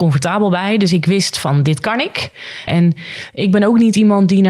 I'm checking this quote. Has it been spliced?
yes; 1 cut; at 2.7 s

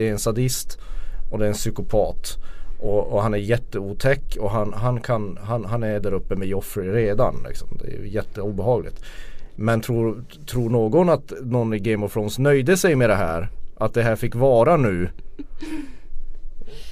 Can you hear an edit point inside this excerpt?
no; 0 cuts

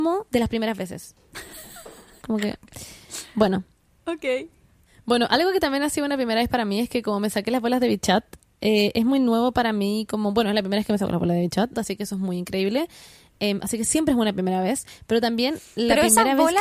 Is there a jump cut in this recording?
yes; 2 cuts; at 2.2 s, 11.7 s

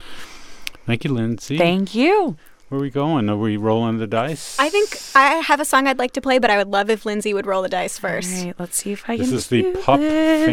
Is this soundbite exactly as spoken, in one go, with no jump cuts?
yes; 0 cuts

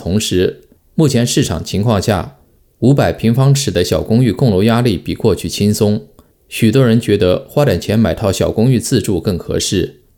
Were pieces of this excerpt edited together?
no; 0 cuts

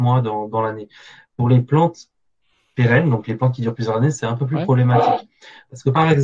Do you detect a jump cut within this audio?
no; 0 cuts

